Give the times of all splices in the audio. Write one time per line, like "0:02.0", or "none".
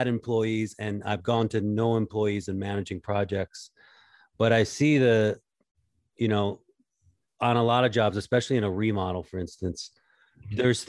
none